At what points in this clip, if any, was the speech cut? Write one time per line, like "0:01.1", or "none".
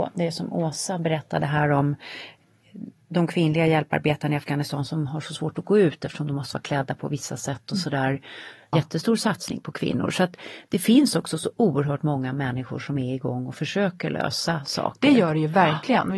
0:08.7